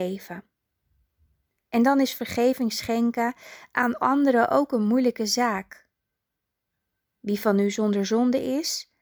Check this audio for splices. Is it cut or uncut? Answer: uncut